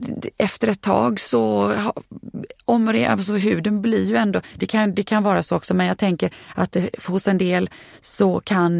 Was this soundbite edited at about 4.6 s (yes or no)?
yes